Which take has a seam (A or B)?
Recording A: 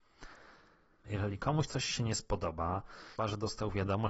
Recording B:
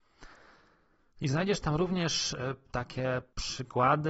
A